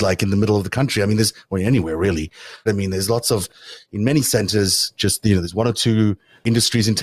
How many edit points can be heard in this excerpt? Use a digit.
1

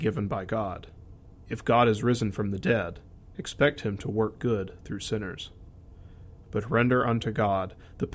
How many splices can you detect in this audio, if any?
2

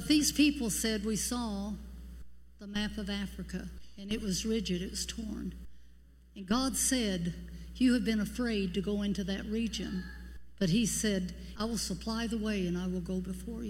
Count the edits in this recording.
1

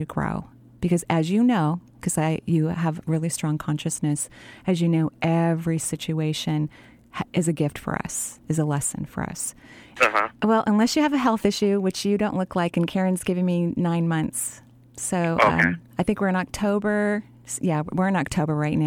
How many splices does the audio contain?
1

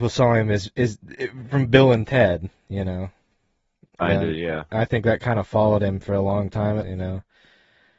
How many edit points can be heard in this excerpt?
1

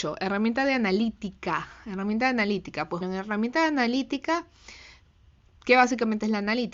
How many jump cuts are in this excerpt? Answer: 1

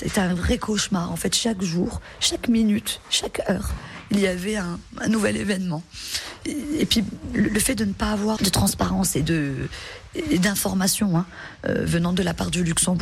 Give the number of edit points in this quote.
1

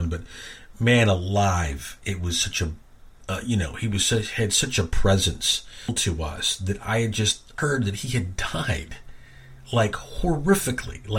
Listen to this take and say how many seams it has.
1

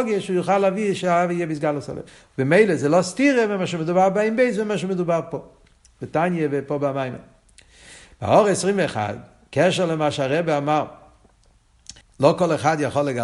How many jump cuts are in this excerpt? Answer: 1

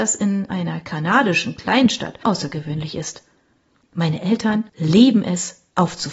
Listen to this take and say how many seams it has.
2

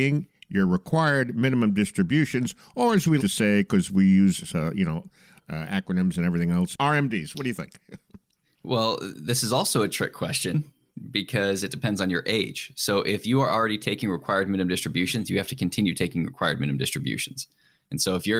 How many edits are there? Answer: 1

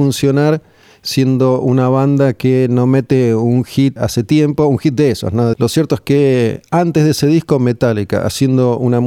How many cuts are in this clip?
2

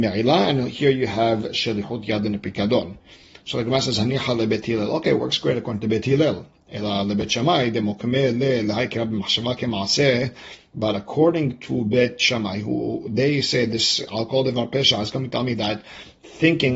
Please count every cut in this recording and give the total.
0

